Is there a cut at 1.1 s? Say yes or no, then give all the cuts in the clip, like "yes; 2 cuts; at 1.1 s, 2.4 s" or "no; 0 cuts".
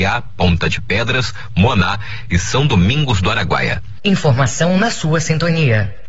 no; 1 cut; at 4.0 s